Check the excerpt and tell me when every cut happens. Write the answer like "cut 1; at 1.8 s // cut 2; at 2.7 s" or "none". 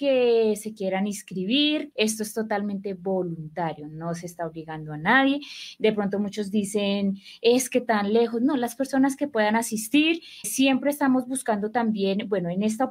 cut 1; at 1.9 s // cut 2; at 10.4 s